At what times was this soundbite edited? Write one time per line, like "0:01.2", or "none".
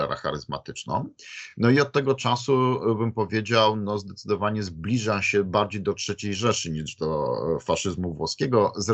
none